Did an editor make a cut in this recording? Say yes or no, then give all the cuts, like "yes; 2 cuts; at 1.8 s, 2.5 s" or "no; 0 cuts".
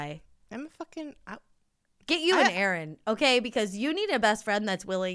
no; 0 cuts